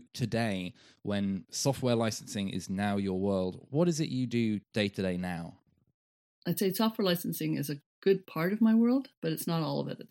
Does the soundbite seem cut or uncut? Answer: cut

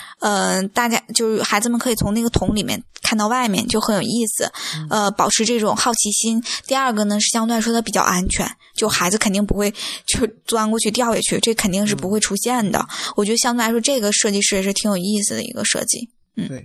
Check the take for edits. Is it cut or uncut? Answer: uncut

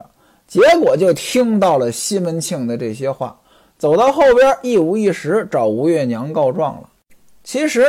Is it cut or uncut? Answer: uncut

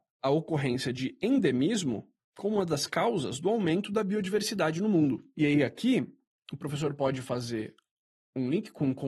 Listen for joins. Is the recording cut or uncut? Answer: uncut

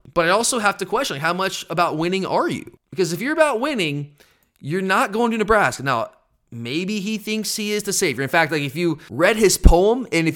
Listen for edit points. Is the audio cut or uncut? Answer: uncut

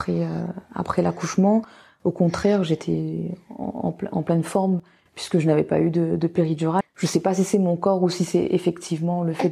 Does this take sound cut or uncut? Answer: cut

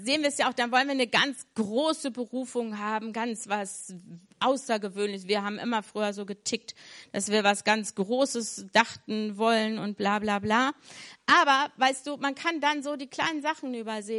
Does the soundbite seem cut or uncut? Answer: uncut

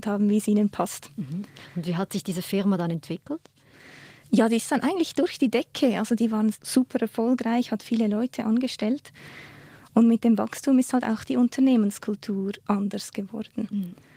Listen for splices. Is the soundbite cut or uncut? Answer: uncut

